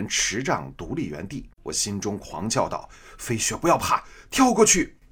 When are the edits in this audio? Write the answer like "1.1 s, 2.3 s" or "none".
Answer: 1.5 s